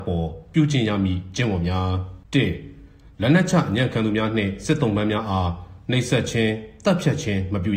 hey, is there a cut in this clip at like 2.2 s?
yes; 1 cut; at 2.2 s

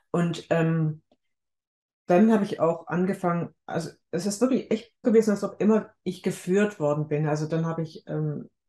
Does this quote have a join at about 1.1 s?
no; 1 cut; at 5.0 s

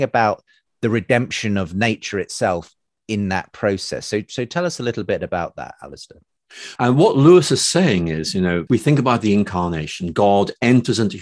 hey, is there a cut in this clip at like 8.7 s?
yes; 2 cuts; at 6.8 s, 8.7 s

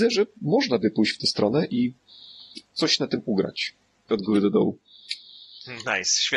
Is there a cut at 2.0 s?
no; 1 cut; at 4.1 s

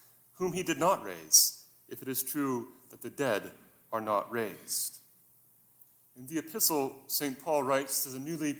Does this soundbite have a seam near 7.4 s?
no; 1 cut; at 6.0 s

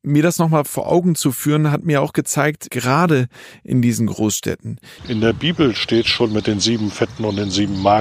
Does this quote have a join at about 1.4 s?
no; 2 cuts; at 2.7 s, 5.0 s

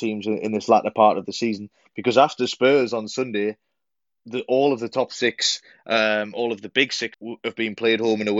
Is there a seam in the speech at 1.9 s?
no; 1 cut; at 7.1 s

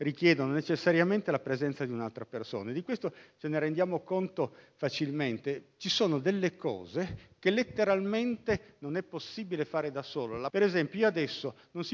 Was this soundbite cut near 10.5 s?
yes; 1 cut; at 10.5 s

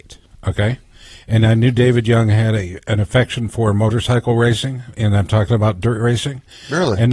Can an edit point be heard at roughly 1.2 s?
no; 0 cuts

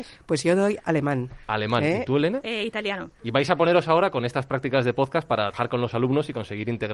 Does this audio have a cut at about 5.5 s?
yes; 2 cuts; at 3.2 s, 5.5 s

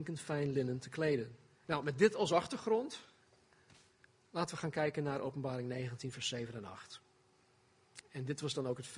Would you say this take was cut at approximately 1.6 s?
yes; 2 cuts; at 1.6 s, 8.0 s

